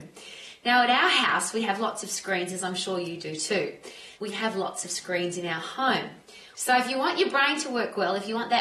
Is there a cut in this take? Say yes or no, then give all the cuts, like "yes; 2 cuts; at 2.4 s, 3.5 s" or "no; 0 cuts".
yes; 2 cuts; at 4.2 s, 6.5 s